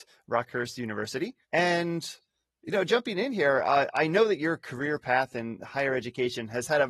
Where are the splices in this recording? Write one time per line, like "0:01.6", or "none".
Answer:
0:01.4